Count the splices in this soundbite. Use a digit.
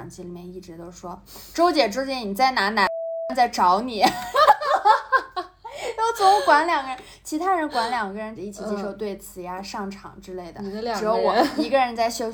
1